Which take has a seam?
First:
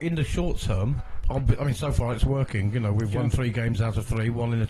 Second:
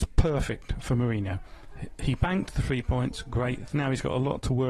second; 1 cut; at 3.7 s

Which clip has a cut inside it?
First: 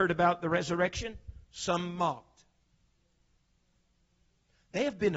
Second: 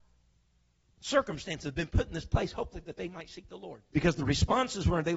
second; 1 cut; at 3.9 s

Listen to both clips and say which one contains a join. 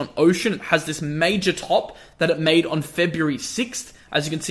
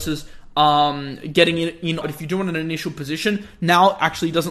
second; 1 cut; at 2.0 s

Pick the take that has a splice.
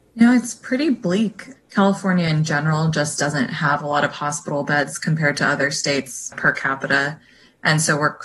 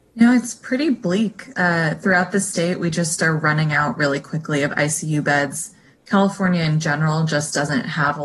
first; 2 cuts; at 1.6 s, 6.3 s

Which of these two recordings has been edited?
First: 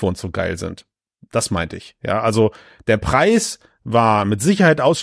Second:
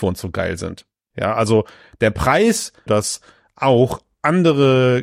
second; 2 cuts; at 1.1 s, 2.9 s

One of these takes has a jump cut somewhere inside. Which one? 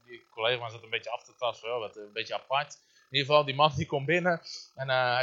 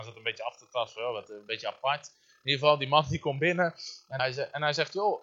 second; 1 cut; at 4.2 s

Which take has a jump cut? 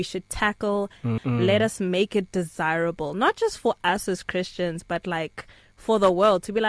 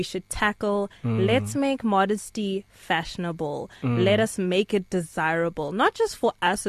first; 1 cut; at 1.2 s

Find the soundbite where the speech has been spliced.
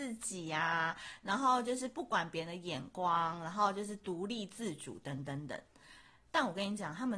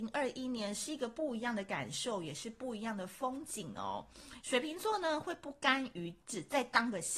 second; 1 cut; at 4.4 s

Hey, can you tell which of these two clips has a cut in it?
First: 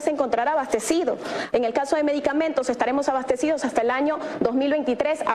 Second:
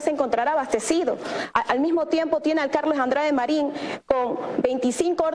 first; 1 cut; at 1.5 s

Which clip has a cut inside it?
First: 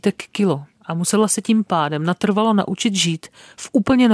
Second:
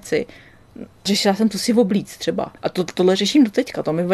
second; 1 cut; at 2.6 s

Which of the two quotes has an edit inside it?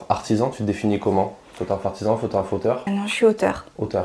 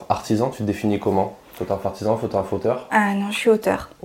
first; 1 cut; at 2.9 s

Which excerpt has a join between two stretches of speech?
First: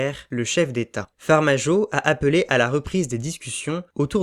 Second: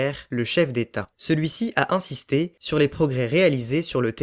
first; 1 cut; at 1.1 s

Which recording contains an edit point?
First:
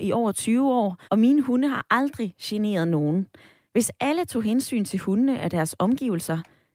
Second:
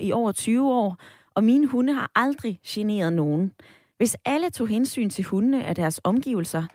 first; 1 cut; at 1.0 s

